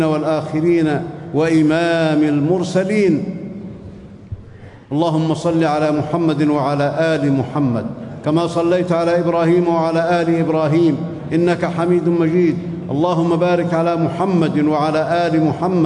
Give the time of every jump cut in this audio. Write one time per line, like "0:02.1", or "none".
0:04.8